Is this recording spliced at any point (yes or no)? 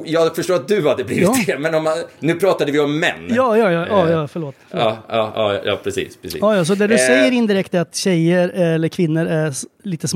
no